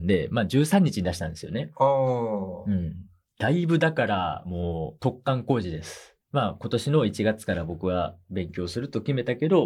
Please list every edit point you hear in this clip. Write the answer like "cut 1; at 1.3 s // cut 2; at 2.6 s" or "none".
none

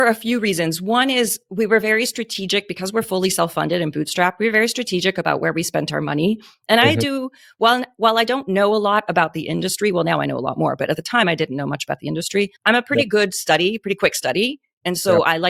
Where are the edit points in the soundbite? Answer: cut 1; at 12.6 s

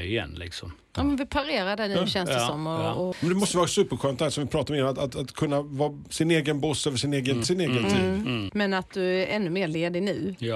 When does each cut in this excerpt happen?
cut 1; at 3.1 s // cut 2; at 7.4 s // cut 3; at 8.5 s

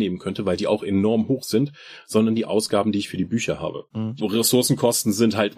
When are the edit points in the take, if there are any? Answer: cut 1; at 4.2 s

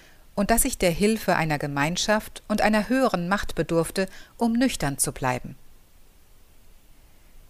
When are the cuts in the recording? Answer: none

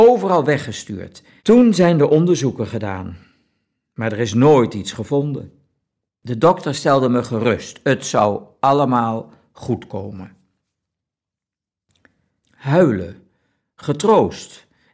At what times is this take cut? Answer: cut 1; at 1.4 s // cut 2; at 6.1 s // cut 3; at 12.4 s

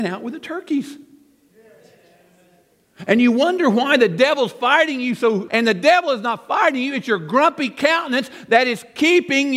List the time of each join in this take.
cut 1; at 5.5 s

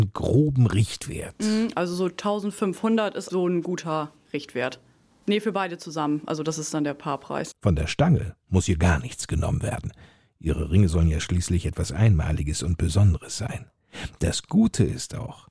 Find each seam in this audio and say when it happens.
cut 1; at 3.3 s // cut 2; at 5.1 s // cut 3; at 7.5 s

